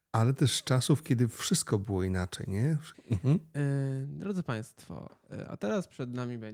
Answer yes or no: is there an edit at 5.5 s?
no